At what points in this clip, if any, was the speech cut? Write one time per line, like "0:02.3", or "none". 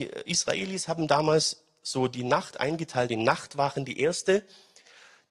none